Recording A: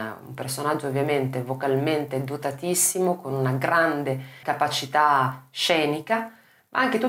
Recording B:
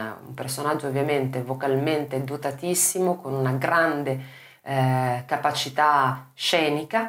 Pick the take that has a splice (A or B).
A